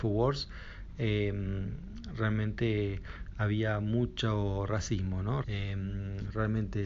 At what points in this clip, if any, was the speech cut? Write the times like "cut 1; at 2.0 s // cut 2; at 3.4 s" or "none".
cut 1; at 5.4 s